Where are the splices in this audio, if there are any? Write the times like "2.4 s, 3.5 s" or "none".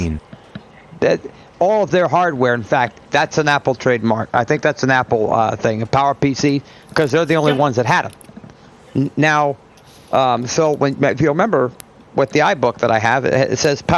3.0 s